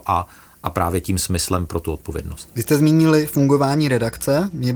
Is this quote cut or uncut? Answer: cut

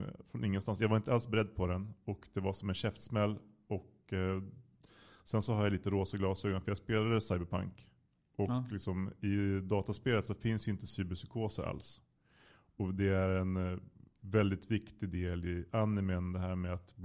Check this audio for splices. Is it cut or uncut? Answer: uncut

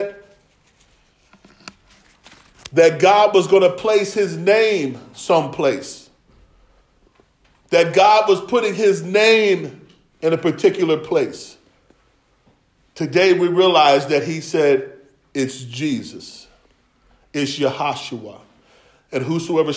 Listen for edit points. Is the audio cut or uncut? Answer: uncut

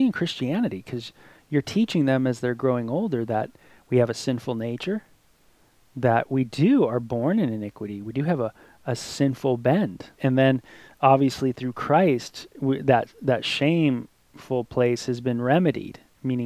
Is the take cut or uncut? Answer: cut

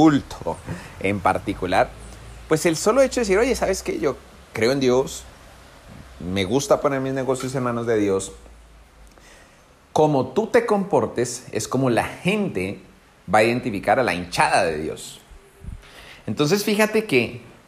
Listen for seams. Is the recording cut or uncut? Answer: uncut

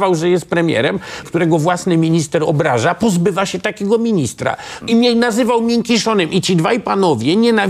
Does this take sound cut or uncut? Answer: cut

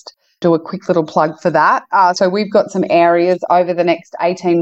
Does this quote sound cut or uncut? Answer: uncut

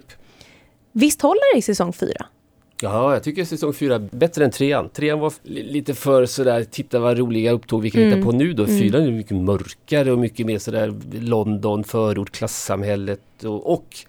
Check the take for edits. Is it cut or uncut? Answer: uncut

